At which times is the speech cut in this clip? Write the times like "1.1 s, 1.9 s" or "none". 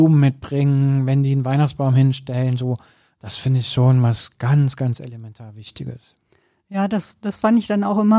none